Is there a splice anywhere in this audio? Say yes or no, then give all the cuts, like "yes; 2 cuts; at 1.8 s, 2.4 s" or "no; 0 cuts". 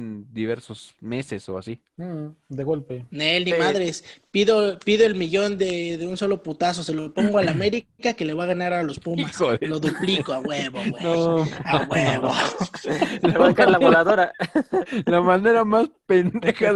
no; 0 cuts